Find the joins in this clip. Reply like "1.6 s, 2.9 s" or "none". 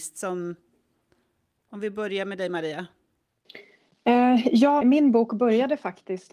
4.8 s